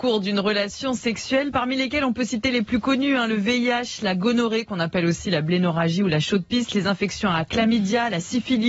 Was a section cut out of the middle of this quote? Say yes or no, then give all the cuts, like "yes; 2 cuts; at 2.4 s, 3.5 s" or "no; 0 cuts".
no; 0 cuts